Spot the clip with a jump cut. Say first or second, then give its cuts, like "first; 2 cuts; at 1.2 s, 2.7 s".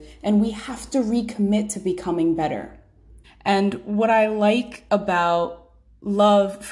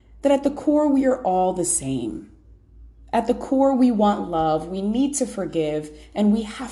first; 1 cut; at 3.2 s